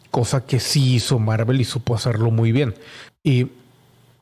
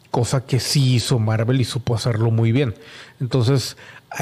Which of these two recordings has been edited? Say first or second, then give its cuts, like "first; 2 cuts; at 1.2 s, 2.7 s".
first; 1 cut; at 3.1 s